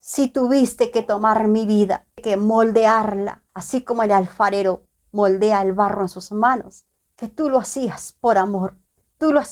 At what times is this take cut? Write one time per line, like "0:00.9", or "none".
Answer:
0:03.5
0:07.0